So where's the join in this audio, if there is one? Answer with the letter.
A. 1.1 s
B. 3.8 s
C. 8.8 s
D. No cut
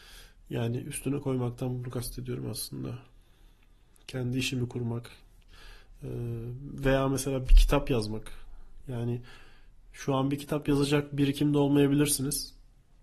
D